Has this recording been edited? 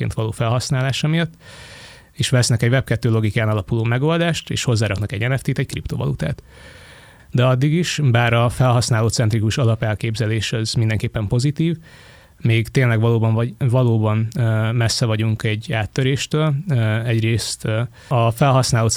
yes; 1 cut; at 7.2 s

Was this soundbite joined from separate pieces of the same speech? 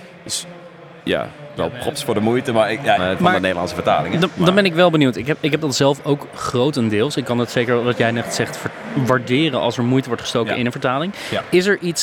yes; 1 cut; at 3.0 s

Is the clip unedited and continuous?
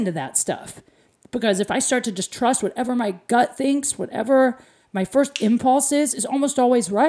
yes; 0 cuts

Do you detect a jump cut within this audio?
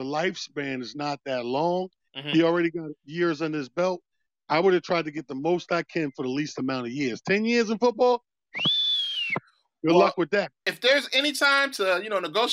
no; 0 cuts

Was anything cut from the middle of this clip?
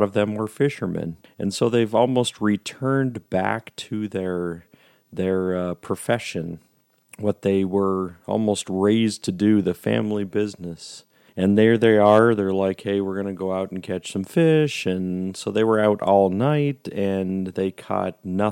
no; 0 cuts

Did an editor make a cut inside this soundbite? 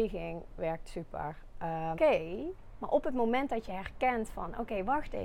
yes; 1 cut; at 1.9 s

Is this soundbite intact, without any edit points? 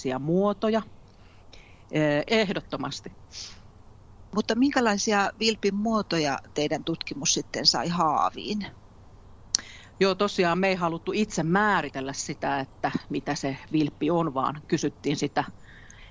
no; 1 cut; at 2.3 s

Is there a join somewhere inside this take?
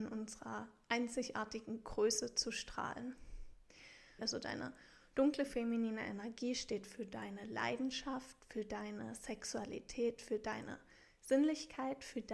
yes; 1 cut; at 4.2 s

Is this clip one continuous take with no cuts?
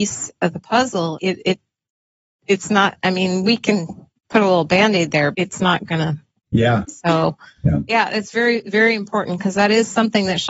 no; 3 cuts; at 1.2 s, 5.3 s, 6.8 s

